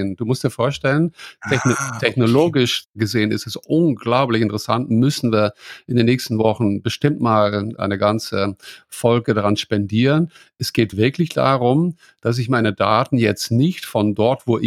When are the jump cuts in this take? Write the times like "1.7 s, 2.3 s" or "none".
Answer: none